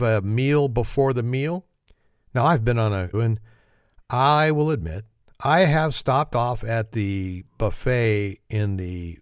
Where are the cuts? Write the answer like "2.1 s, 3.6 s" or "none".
3.1 s